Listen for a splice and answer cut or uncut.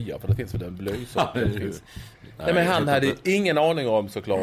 cut